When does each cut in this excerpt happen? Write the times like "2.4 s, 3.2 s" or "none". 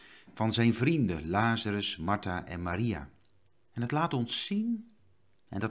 3.5 s